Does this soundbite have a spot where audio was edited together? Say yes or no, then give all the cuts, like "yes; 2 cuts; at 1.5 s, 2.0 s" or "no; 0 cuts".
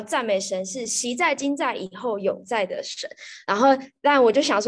no; 0 cuts